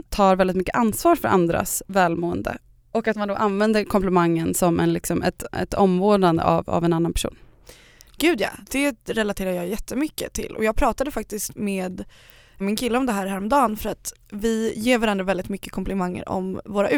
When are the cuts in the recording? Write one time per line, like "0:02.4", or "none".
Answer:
none